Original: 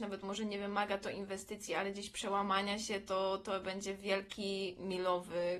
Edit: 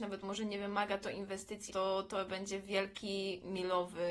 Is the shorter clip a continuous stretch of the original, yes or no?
no